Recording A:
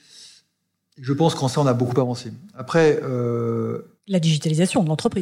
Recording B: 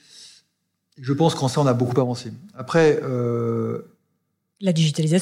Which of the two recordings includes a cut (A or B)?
A